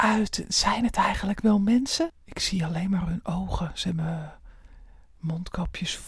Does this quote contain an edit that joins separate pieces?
yes; 1 cut; at 2.1 s

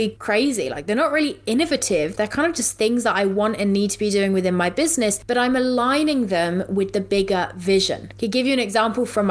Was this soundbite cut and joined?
no; 0 cuts

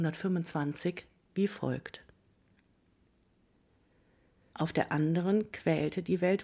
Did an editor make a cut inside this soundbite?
yes; 1 cut; at 4.5 s

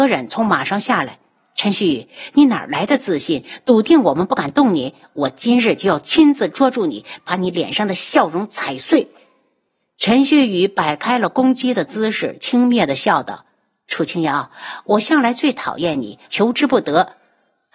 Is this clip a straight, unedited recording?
no; 1 cut; at 16.3 s

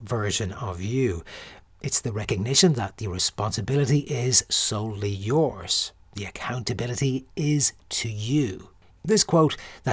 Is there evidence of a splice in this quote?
yes; 1 cut; at 8.9 s

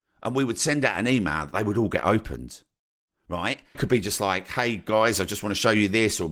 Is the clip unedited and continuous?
no; 1 cut; at 3.7 s

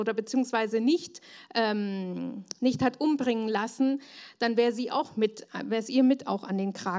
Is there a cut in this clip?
no; 0 cuts

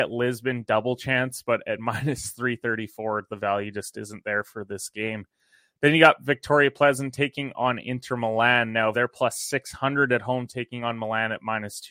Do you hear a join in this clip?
yes; 1 cut; at 8.9 s

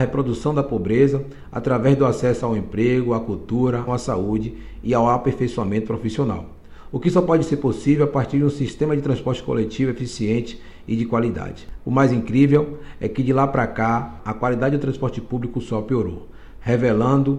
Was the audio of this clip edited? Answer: yes; 3 cuts; at 3.9 s, 11.8 s, 14.2 s

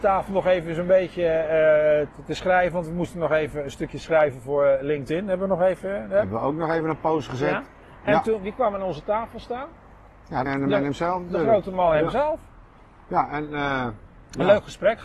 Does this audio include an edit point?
yes; 1 cut; at 10.5 s

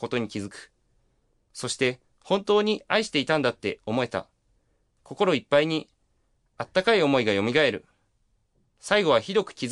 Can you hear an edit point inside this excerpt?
no; 0 cuts

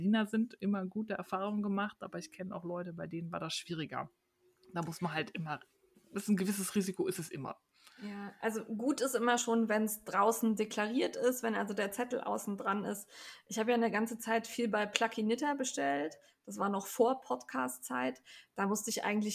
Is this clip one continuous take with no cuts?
yes; 0 cuts

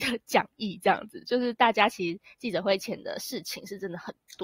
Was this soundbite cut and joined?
no; 0 cuts

